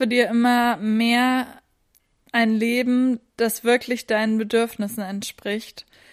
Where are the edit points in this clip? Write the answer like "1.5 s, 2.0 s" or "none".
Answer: none